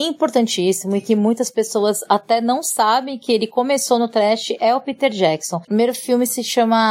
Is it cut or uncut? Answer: cut